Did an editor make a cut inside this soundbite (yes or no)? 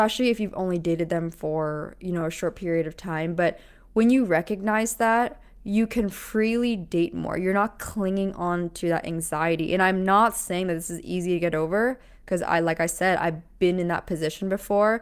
no